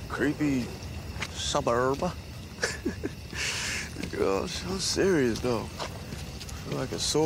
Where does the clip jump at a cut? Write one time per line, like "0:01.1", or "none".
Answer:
0:01.3